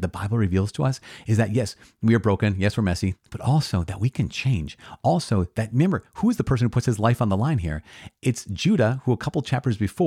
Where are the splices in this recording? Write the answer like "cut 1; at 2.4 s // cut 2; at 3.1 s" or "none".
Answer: cut 1; at 3.1 s